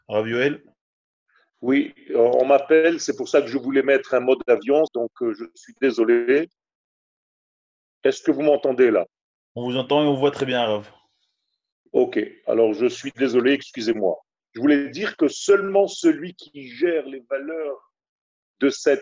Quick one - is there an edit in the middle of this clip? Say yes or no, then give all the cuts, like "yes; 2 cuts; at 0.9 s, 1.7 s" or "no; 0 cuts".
yes; 1 cut; at 4.9 s